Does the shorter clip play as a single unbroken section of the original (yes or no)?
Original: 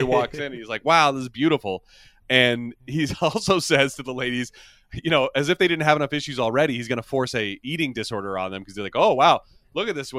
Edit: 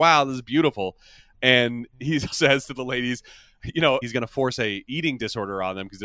no